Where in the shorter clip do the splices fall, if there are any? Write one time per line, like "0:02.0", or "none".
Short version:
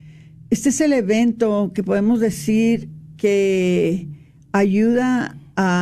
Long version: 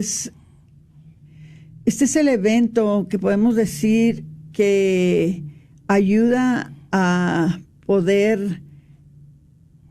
none